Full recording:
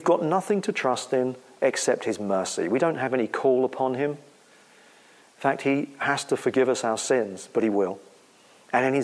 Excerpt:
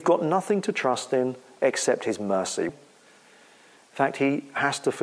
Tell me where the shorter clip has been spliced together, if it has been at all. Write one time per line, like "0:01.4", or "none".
0:02.7